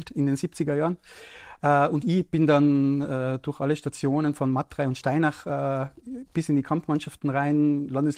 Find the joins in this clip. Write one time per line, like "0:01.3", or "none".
none